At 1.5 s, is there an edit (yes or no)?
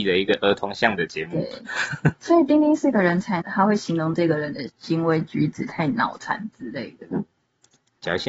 no